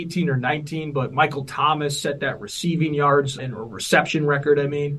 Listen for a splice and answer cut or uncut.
cut